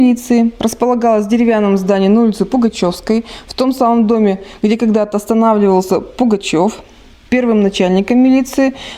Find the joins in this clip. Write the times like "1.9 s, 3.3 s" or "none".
7.3 s

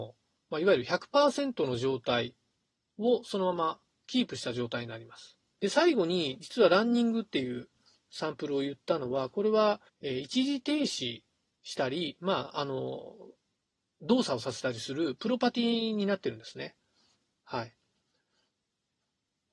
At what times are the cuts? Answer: 5.6 s, 9.9 s

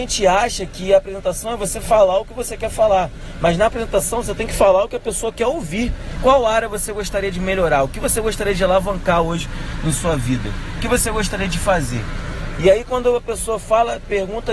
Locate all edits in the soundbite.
6.2 s

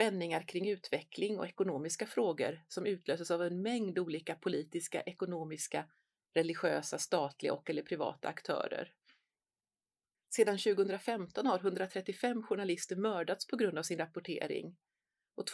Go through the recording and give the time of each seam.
10.1 s

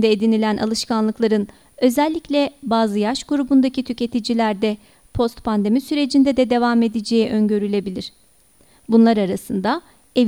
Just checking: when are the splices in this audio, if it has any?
none

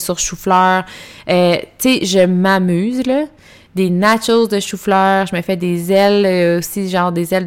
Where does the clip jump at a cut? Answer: none

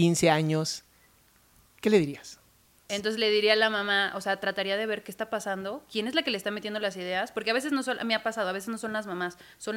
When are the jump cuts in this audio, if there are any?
2.9 s

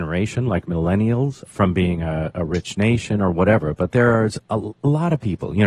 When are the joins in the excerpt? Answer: 1.5 s

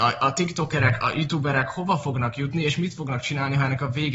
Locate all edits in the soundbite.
none

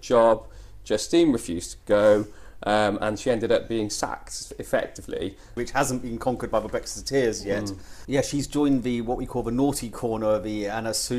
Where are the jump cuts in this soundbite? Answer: 5.6 s, 8.0 s

